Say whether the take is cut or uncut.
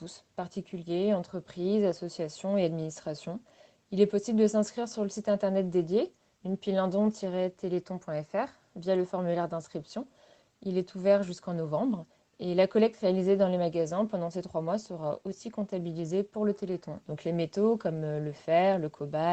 cut